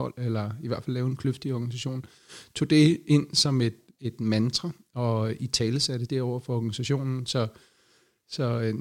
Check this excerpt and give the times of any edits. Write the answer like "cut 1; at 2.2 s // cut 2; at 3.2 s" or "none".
none